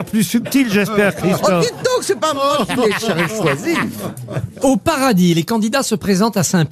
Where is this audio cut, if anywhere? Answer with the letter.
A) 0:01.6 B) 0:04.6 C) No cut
C